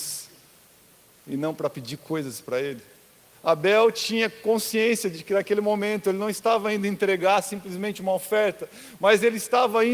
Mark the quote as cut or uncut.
cut